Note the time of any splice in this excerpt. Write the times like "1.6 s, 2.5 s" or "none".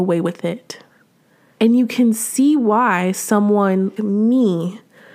1.5 s, 4.0 s